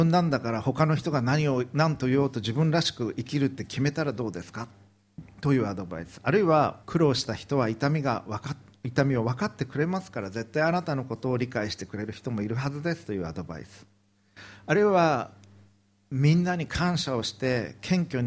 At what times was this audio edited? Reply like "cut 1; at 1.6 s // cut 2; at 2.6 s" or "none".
cut 1; at 6.8 s